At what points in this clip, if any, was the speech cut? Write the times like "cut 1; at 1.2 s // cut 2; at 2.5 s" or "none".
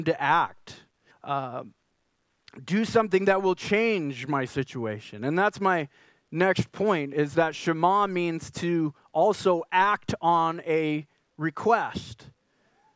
cut 1; at 1.1 s

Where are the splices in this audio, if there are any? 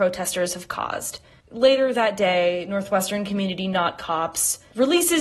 cut 1; at 1.4 s

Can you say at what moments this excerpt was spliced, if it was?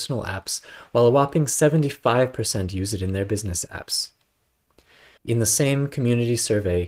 cut 1; at 5.2 s

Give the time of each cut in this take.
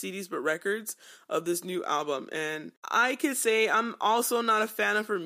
cut 1; at 2.8 s

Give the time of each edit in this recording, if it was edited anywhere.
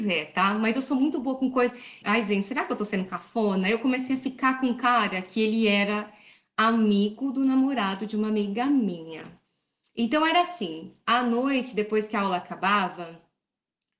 cut 1; at 2.0 s

